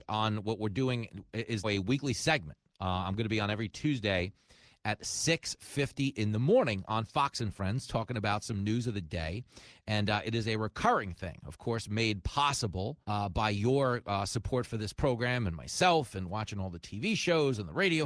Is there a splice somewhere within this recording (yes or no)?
yes